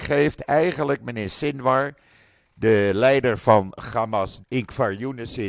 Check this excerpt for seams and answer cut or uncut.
cut